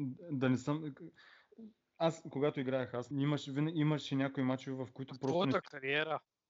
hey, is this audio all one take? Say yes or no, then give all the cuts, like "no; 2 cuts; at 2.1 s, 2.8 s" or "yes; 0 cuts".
no; 1 cut; at 3.1 s